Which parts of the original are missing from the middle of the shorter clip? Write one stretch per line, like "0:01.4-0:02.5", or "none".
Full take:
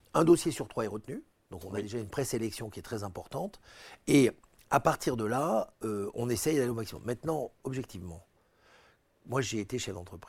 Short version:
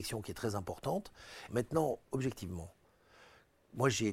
0:04.0-0:07.0